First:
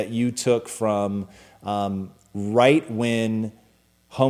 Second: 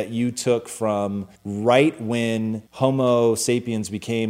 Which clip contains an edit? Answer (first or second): second